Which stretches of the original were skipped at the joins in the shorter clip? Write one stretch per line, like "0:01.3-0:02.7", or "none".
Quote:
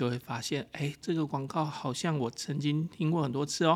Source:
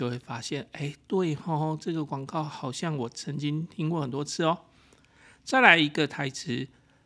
0:01.0-0:01.8